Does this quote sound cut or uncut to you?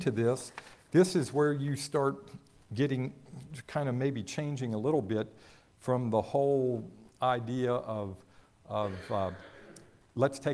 uncut